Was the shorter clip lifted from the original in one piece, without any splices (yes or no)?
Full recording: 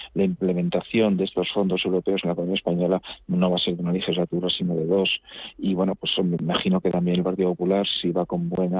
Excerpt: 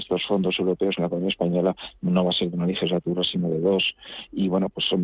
yes